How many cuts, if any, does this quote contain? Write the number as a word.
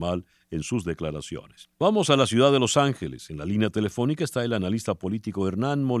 one